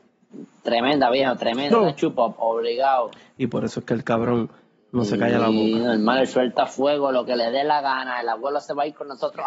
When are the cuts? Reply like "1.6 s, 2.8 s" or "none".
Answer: 1.7 s, 3.3 s